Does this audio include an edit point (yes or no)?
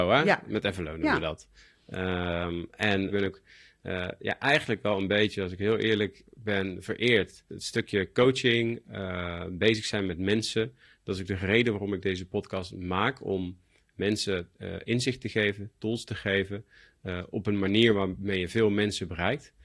no